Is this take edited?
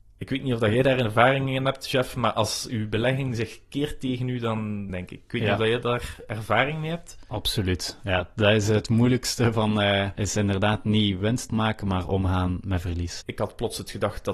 yes; 3 cuts; at 4.9 s, 10.2 s, 13.2 s

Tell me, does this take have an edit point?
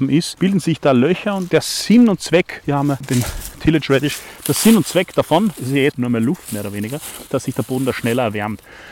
yes; 2 cuts; at 5.9 s, 7.3 s

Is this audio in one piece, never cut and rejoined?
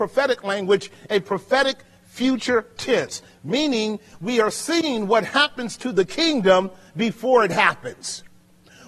yes; 0 cuts

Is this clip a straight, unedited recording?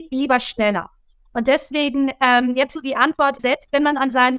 no; 1 cut; at 3.4 s

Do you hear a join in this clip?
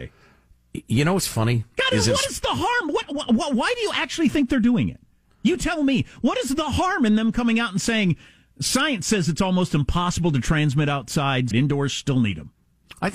yes; 1 cut; at 11.5 s

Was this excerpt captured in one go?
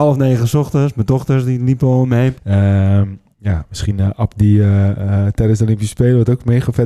no; 1 cut; at 2.3 s

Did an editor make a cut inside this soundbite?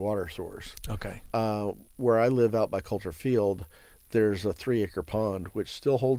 no; 0 cuts

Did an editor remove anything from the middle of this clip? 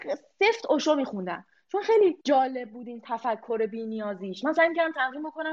yes; 1 cut; at 2.2 s

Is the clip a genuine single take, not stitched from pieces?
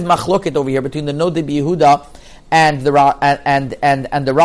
yes; 0 cuts

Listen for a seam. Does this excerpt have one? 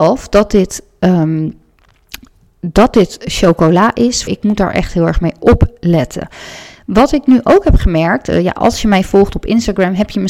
yes; 1 cut; at 4.3 s

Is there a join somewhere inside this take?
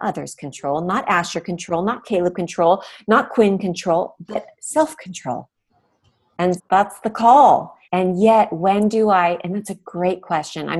yes; 2 cuts; at 6.6 s, 7.8 s

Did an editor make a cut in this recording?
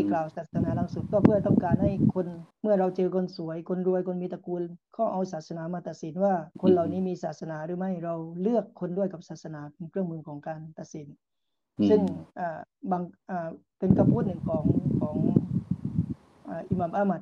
yes; 2 cuts; at 2.5 s, 6.5 s

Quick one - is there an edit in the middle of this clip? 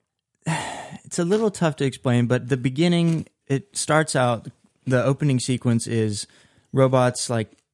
no; 0 cuts

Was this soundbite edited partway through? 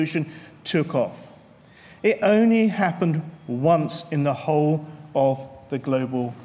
no; 0 cuts

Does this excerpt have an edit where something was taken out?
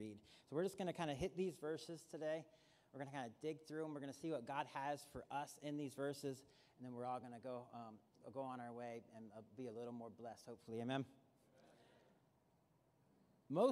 no; 0 cuts

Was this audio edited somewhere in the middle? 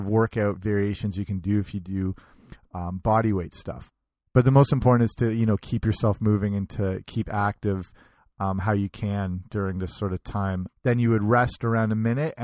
yes; 1 cut; at 10.7 s

